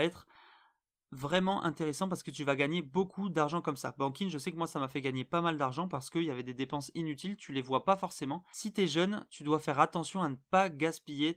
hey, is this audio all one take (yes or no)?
no